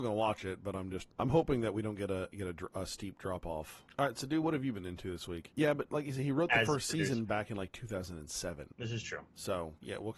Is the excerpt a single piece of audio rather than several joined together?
no; 2 cuts; at 3.9 s, 5.5 s

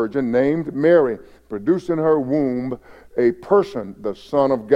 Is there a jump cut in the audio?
no; 0 cuts

